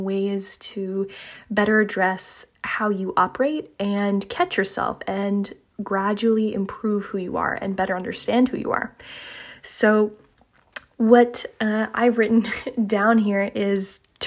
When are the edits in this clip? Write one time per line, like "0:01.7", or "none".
none

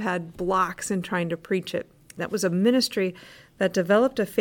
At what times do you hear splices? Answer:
0:02.2

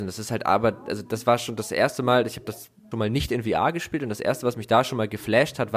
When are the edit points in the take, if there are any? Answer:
0:02.9

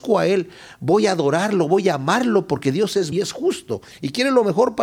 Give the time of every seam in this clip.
0:03.1

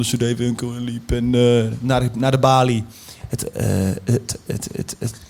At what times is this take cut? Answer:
0:03.2

